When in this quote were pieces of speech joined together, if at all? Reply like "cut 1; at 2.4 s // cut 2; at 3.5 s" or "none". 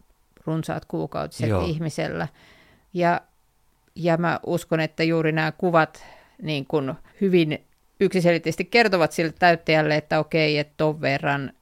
cut 1; at 2.9 s // cut 2; at 7.1 s